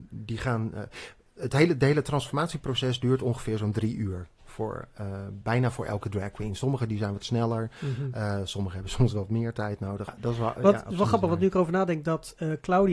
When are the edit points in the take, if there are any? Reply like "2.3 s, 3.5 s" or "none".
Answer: 10.1 s

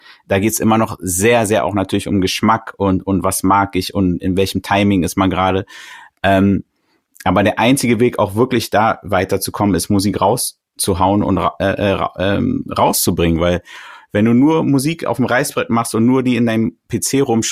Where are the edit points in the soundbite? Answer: none

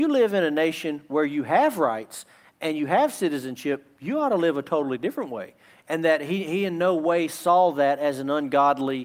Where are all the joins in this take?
5.7 s

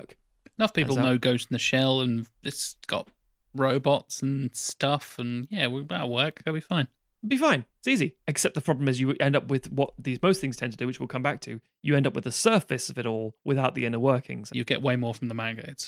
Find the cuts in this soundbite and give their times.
14.5 s

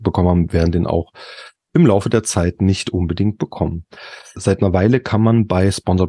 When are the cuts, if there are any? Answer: 4.3 s

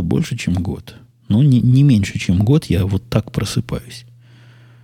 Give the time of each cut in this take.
none

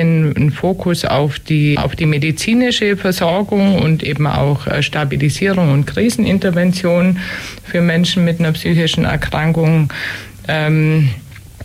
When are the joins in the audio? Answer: 1.8 s

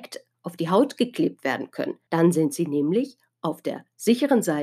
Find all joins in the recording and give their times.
2.1 s

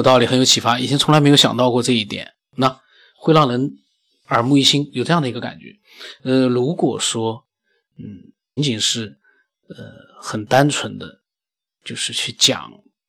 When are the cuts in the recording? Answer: 8.6 s

